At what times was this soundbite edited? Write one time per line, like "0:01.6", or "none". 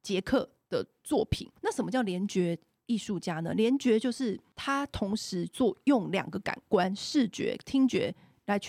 0:01.6

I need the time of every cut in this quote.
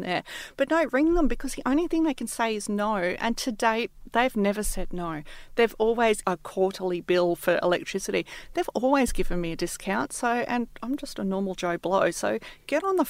0:06.2

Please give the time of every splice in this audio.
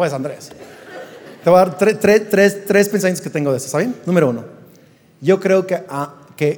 0:04.0

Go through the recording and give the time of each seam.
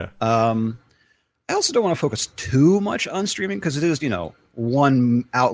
0:04.0

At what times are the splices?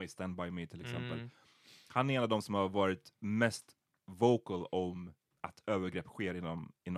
none

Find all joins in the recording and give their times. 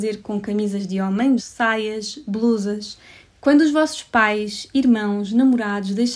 0:01.4
0:03.2

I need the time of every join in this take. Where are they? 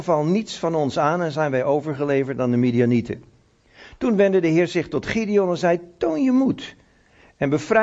none

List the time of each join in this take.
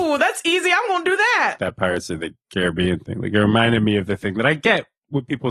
0:01.6

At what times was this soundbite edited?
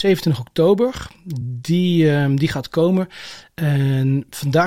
none

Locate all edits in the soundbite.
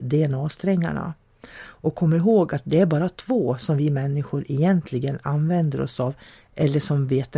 none

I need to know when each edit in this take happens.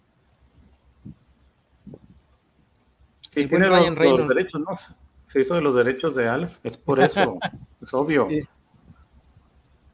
0:06.6

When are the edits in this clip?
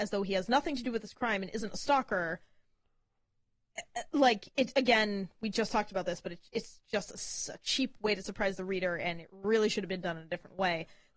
none

